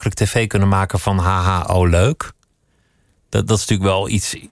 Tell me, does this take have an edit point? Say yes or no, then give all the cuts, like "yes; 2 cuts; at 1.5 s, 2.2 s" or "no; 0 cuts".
no; 0 cuts